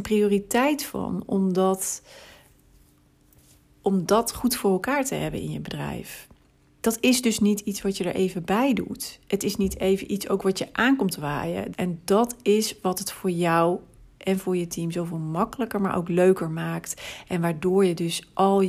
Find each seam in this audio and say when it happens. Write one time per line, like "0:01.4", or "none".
0:11.7